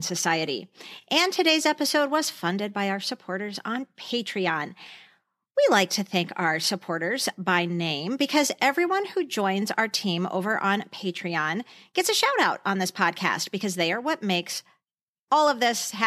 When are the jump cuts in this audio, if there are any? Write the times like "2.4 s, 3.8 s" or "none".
none